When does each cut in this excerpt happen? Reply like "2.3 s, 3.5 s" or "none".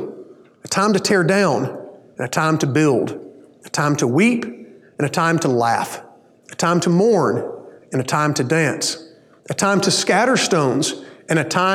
none